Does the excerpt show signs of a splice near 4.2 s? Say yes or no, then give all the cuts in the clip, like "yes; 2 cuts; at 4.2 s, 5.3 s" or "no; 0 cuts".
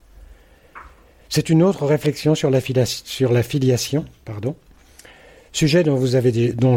no; 0 cuts